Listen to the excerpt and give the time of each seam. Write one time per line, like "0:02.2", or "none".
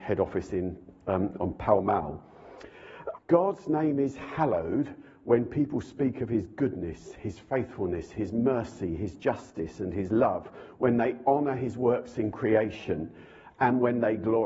0:03.2